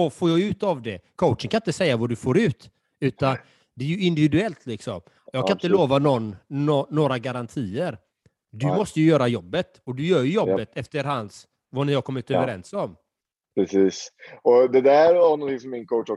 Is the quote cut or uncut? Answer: uncut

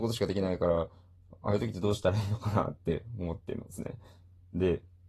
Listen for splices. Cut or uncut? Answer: uncut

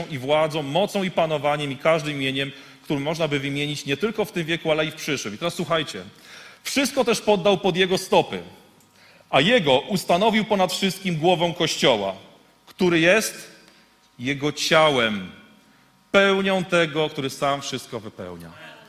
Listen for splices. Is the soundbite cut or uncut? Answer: uncut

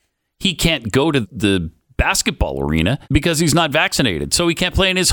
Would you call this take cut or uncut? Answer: cut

